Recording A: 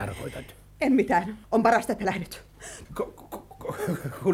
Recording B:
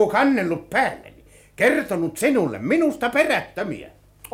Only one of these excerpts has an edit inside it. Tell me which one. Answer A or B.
A